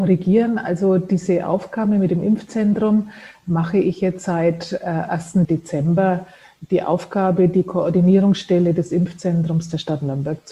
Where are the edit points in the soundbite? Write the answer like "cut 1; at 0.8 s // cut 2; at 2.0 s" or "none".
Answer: cut 1; at 5.4 s

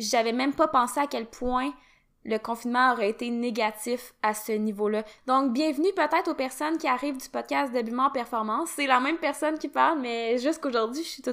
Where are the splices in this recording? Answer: cut 1; at 5.2 s

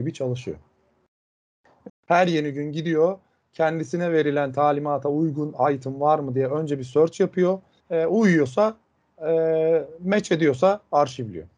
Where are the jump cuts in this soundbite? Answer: cut 1; at 1.9 s // cut 2; at 7.8 s

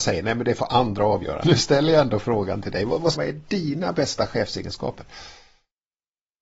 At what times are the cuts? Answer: cut 1; at 1.4 s // cut 2; at 3.1 s

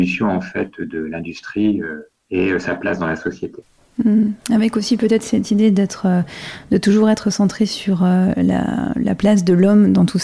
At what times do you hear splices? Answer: none

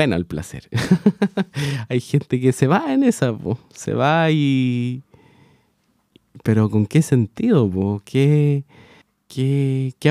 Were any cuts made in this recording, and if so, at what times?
none

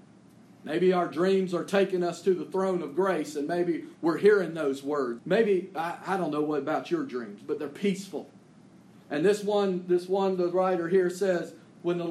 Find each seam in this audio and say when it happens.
cut 1; at 5.2 s

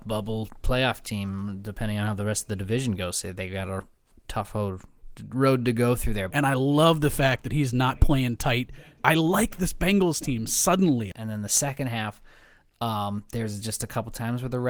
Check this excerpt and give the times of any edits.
cut 1; at 6.3 s // cut 2; at 9.0 s // cut 3; at 11.1 s

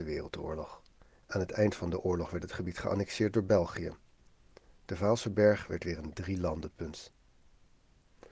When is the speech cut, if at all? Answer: cut 1; at 1.1 s

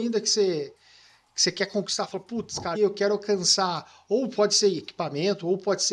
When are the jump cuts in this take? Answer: cut 1; at 2.7 s

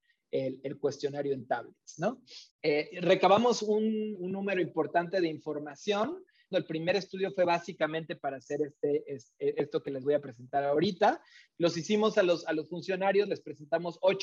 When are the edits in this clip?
cut 1; at 2.5 s // cut 2; at 4.1 s // cut 3; at 6.5 s

